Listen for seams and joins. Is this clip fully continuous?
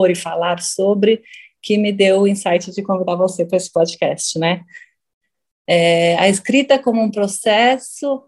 yes; 0 cuts

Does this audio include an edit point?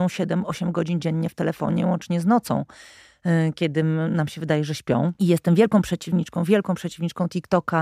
no; 0 cuts

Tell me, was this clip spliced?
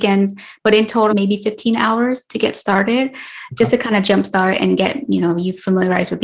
yes; 1 cut; at 1.1 s

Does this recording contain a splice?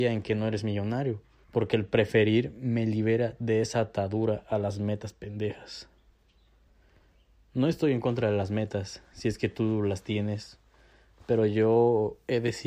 yes; 1 cut; at 1.4 s

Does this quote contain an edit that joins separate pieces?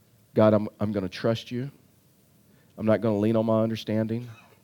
no; 0 cuts

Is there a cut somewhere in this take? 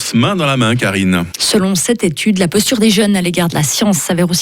yes; 1 cut; at 1.3 s

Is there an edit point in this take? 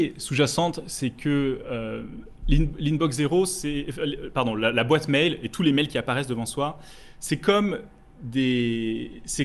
no; 0 cuts

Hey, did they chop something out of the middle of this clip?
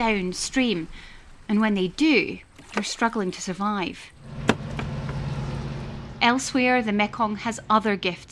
no; 0 cuts

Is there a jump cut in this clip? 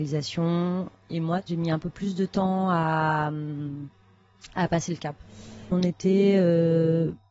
yes; 1 cut; at 5.7 s

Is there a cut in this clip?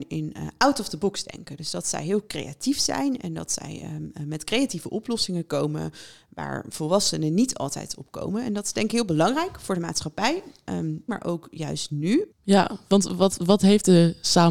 yes; 2 cuts; at 11.1 s, 12.3 s

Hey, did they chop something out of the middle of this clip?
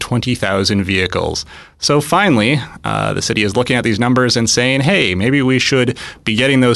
no; 0 cuts

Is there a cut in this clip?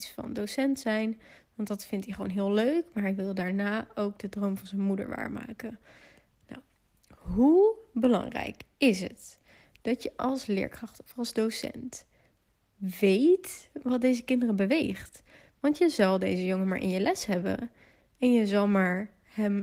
no; 0 cuts

